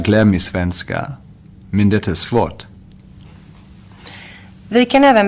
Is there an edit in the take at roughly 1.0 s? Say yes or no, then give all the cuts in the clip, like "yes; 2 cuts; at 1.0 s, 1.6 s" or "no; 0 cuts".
no; 0 cuts